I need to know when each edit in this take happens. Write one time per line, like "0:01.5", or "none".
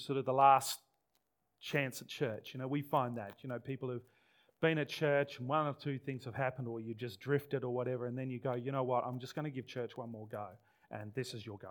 none